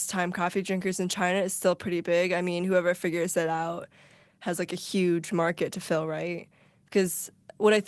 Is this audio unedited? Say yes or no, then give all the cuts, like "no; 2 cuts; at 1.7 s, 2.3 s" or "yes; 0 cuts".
yes; 0 cuts